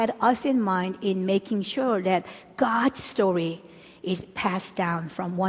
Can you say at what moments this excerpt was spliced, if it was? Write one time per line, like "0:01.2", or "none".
none